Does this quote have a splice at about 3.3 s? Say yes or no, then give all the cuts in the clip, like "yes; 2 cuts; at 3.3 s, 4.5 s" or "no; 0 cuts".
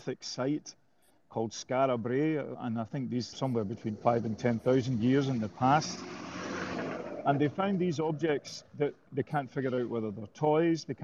yes; 2 cuts; at 3.3 s, 9.1 s